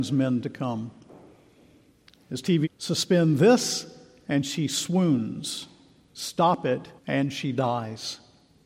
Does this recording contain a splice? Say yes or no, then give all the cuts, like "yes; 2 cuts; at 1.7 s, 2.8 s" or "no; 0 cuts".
yes; 2 cuts; at 2.6 s, 7.0 s